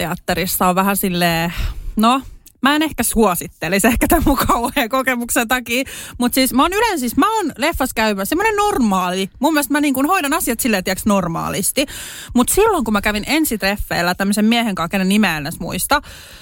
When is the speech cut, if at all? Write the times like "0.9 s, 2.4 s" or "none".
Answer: none